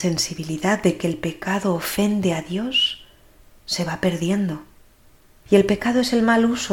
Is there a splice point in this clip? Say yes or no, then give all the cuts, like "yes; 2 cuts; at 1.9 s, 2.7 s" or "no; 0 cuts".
yes; 1 cut; at 5.5 s